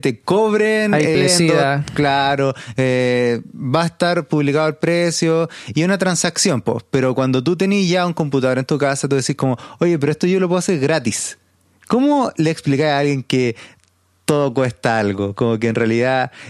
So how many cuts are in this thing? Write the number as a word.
one